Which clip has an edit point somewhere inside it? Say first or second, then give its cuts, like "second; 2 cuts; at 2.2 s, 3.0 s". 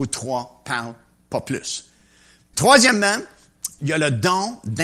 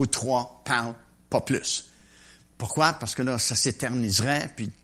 first; 2 cuts; at 2.5 s, 3.8 s